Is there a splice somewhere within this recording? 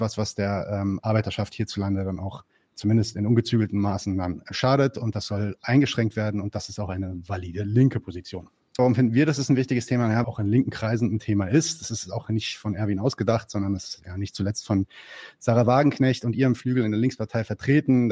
yes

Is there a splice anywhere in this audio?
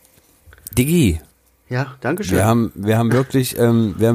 no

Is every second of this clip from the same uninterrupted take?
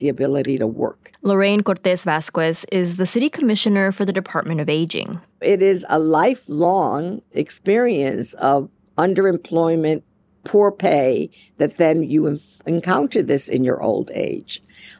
yes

